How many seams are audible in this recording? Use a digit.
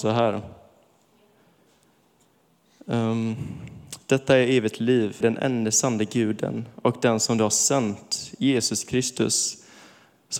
1